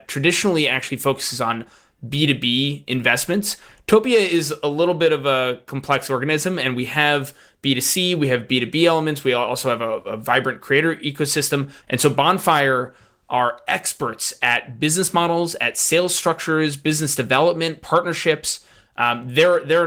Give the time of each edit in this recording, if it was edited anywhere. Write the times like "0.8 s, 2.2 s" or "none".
11.8 s